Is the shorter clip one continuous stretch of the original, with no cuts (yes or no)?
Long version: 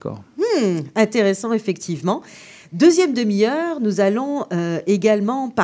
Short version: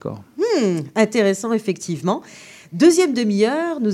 yes